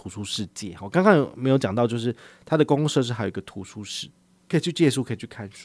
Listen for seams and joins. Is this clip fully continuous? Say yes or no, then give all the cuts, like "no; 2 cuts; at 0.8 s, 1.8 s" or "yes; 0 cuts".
yes; 0 cuts